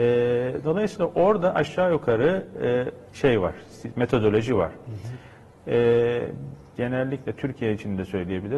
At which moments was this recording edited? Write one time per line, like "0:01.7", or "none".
0:03.1
0:05.5
0:06.8